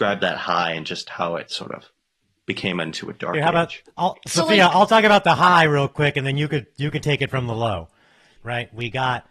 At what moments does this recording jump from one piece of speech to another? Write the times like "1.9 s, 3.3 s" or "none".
8.4 s